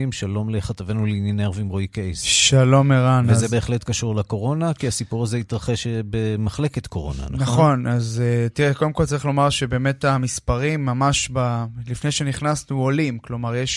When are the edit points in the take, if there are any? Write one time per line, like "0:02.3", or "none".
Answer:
none